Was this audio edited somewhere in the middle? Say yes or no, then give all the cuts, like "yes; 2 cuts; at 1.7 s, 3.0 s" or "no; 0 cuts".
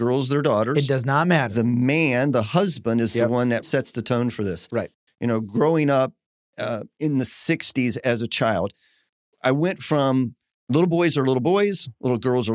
yes; 2 cuts; at 3.6 s, 5.1 s